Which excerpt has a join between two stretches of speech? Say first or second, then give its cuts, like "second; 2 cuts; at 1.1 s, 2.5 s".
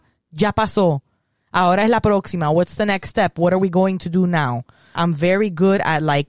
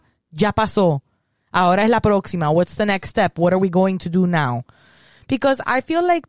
first; 1 cut; at 4.9 s